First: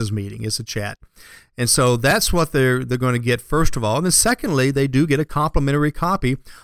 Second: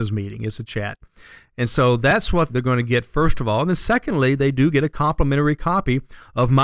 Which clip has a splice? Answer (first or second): second